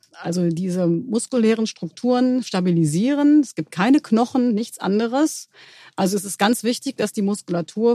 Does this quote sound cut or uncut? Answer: uncut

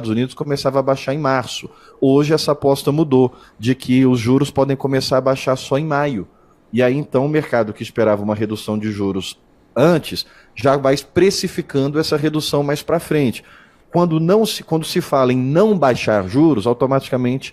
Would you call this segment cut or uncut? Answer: uncut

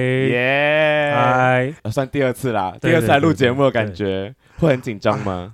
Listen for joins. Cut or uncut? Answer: cut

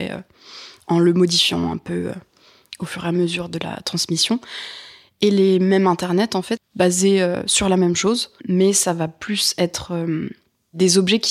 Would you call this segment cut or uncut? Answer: cut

